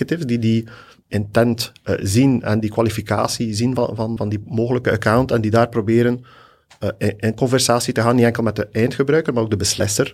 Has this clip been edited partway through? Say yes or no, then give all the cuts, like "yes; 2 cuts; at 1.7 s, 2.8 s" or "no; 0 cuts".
yes; 1 cut; at 4.2 s